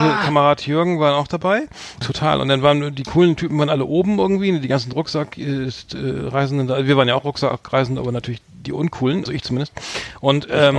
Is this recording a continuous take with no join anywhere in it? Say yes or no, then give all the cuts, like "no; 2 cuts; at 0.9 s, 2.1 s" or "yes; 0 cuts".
no; 2 cuts; at 2.0 s, 9.3 s